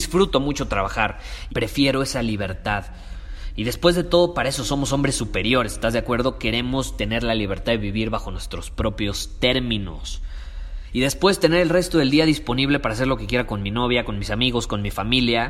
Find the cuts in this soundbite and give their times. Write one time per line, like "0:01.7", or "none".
0:01.5
0:10.9